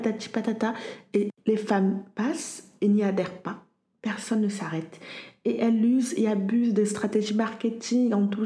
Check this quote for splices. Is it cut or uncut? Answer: uncut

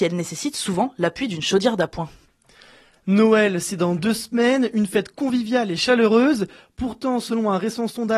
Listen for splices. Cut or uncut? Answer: uncut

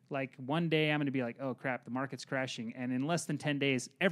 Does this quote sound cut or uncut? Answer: uncut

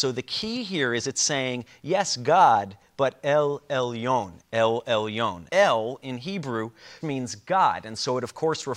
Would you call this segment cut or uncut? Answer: cut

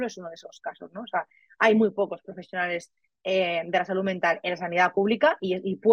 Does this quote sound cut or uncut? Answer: uncut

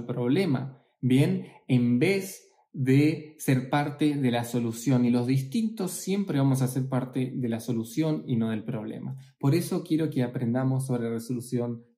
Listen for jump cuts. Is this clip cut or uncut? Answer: uncut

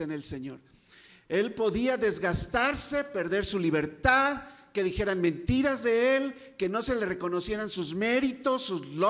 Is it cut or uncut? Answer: uncut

